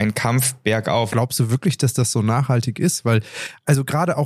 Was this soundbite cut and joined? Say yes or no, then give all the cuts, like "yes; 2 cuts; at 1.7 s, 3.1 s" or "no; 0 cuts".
yes; 1 cut; at 1.1 s